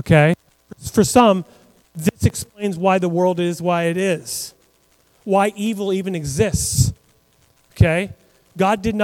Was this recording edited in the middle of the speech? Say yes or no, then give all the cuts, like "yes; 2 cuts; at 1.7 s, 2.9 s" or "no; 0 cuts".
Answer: no; 0 cuts